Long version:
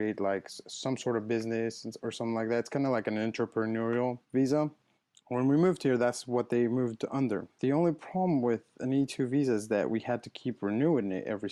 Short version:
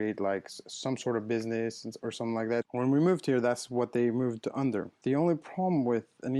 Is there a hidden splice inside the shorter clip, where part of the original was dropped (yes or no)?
yes